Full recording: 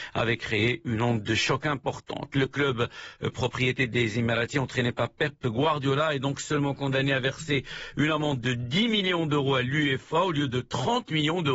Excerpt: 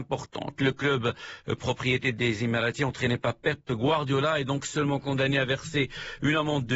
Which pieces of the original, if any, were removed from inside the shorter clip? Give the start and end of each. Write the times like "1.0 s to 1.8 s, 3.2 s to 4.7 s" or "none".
none